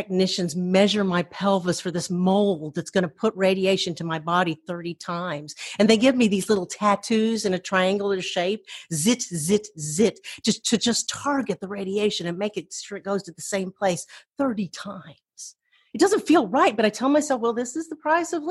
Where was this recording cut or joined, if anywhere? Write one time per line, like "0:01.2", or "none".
none